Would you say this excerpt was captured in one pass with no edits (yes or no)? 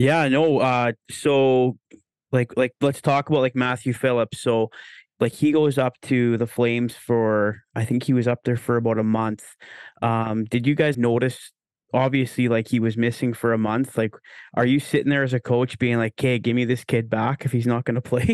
no